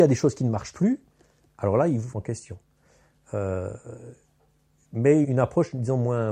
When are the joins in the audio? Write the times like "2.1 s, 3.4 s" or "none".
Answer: 2.1 s, 5.2 s